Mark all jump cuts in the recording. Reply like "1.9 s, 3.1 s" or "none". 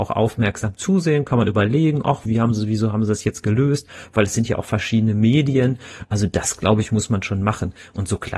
2.2 s